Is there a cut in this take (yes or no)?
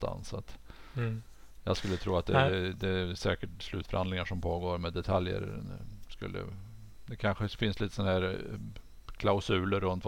no